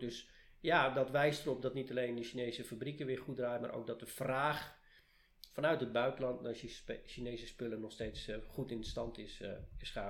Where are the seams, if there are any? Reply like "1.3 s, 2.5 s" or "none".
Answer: none